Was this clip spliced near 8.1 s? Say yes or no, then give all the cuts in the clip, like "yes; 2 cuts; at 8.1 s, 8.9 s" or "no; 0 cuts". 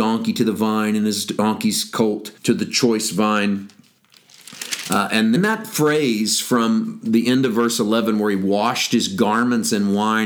no; 2 cuts; at 2.4 s, 5.4 s